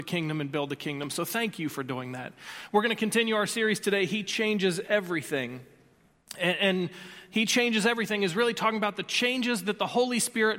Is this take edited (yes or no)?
no